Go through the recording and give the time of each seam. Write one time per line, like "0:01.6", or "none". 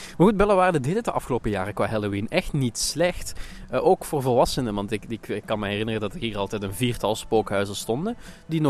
none